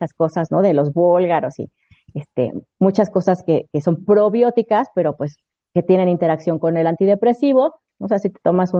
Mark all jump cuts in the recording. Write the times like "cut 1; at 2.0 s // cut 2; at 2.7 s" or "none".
cut 1; at 7.9 s